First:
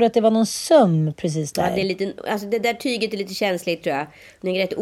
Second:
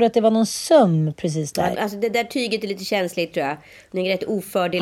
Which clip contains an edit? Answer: second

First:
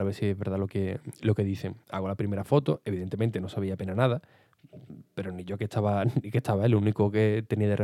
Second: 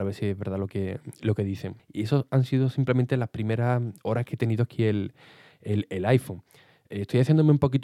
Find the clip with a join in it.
second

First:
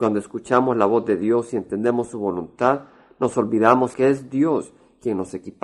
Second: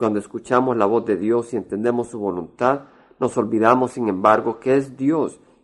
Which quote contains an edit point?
first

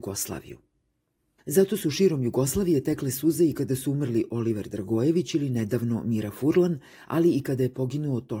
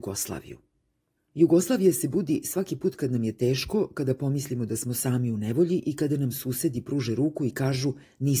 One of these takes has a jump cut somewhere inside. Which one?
second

